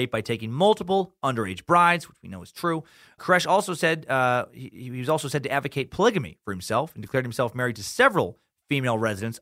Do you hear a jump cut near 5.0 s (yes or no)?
no